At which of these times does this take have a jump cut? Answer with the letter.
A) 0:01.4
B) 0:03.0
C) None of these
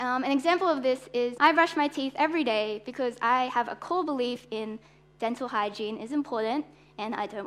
A